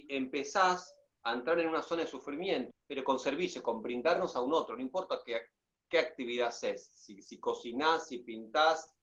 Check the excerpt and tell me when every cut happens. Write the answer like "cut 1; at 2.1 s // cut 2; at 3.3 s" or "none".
cut 1; at 2.7 s